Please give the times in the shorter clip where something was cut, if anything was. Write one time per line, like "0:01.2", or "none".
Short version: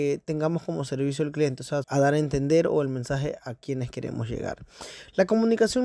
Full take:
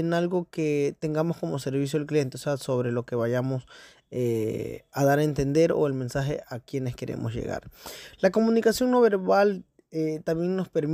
0:01.8